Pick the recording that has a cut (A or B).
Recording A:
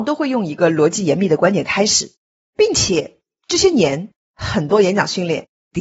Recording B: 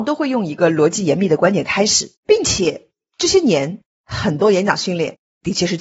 B